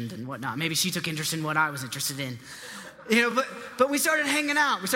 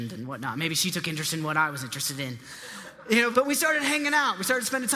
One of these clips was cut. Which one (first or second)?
second